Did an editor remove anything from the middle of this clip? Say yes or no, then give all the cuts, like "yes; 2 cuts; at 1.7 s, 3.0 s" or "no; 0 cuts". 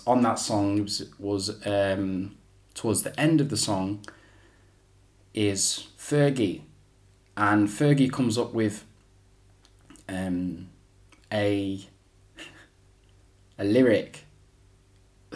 no; 0 cuts